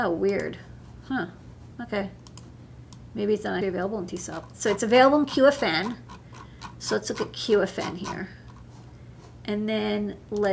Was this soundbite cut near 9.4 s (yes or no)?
no